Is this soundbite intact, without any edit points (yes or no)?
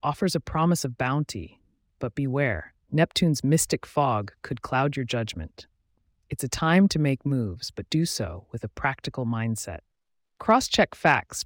yes